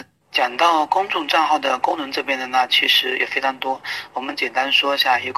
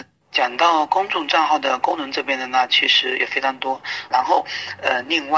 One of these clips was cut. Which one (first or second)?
second